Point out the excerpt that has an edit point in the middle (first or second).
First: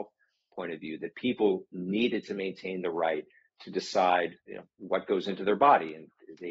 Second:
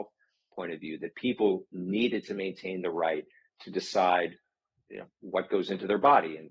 first